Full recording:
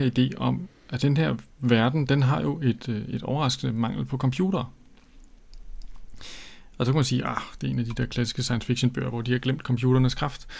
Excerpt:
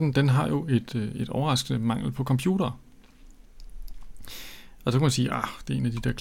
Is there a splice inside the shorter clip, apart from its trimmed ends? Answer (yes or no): no